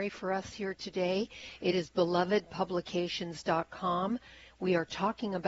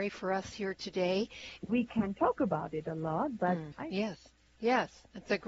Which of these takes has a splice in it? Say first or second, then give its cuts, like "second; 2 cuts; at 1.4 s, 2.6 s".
second; 2 cuts; at 1.6 s, 3.7 s